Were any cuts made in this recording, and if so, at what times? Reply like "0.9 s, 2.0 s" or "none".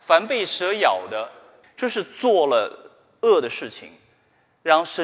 1.6 s